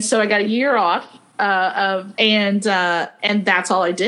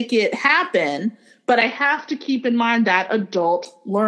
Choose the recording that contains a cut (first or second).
first